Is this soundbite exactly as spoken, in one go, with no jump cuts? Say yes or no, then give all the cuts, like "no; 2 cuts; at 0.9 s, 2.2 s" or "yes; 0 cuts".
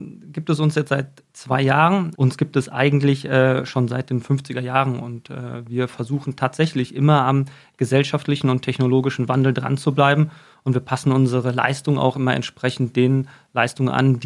no; 1 cut; at 2.1 s